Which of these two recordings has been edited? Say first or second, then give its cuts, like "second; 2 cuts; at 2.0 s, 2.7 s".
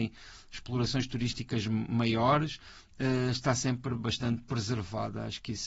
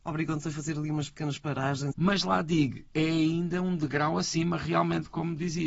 second; 1 cut; at 1.9 s